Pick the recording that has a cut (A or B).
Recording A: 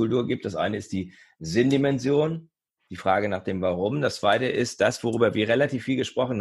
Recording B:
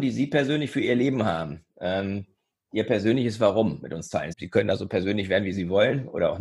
B